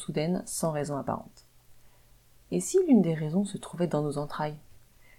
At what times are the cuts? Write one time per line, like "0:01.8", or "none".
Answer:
none